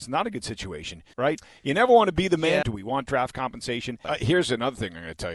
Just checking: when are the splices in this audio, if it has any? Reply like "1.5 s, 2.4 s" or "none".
1.1 s, 2.6 s, 4.0 s